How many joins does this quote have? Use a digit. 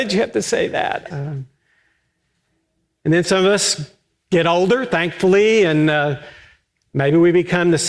1